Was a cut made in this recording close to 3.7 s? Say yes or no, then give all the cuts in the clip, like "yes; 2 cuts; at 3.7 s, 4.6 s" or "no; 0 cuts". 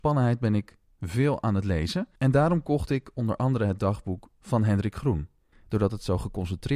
no; 2 cuts; at 2.1 s, 5.5 s